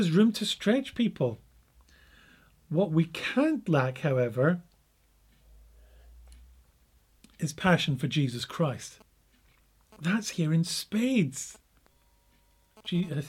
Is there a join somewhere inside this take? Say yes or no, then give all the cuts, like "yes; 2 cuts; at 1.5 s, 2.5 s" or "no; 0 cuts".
no; 0 cuts